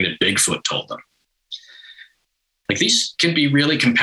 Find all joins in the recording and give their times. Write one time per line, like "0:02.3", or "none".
0:02.7